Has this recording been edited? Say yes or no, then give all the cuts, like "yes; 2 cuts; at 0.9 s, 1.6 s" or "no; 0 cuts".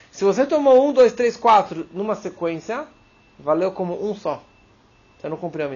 no; 0 cuts